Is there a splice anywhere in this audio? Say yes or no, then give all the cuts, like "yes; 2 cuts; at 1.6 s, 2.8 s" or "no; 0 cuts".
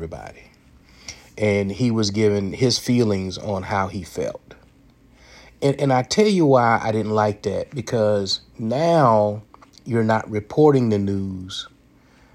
no; 0 cuts